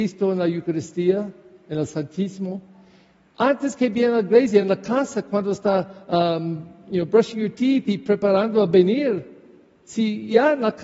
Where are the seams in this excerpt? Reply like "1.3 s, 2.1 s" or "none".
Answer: none